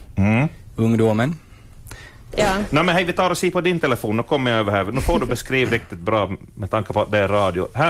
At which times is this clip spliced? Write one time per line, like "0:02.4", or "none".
0:02.3